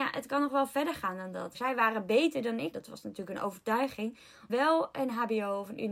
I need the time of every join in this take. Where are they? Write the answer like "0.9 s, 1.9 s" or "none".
1.5 s, 2.7 s, 4.5 s